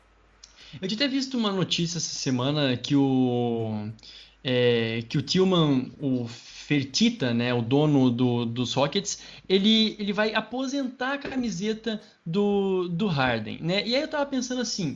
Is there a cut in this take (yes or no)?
no